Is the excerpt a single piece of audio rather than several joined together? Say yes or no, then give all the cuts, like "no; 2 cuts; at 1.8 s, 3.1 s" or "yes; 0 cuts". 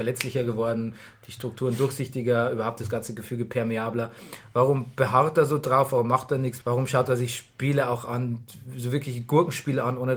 no; 1 cut; at 6.6 s